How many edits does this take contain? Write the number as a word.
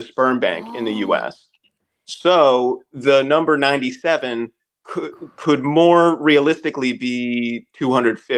zero